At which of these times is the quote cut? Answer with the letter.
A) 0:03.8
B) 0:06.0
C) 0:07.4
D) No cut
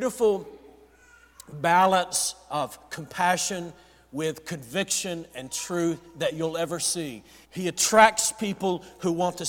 C